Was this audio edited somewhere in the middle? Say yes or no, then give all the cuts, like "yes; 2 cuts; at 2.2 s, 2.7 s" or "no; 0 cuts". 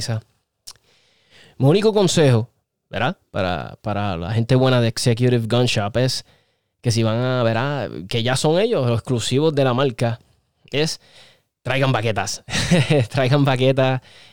no; 0 cuts